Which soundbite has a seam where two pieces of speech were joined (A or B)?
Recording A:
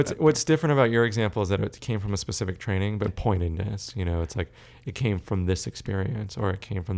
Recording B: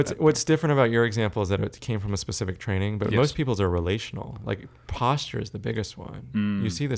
A